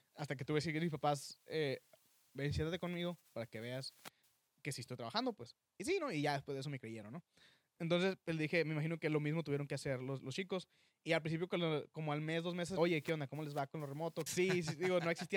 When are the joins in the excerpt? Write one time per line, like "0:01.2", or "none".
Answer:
0:12.8
0:14.3